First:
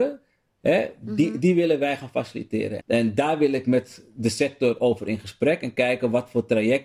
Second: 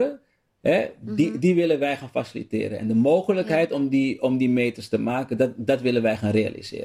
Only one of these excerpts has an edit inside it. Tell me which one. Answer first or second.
first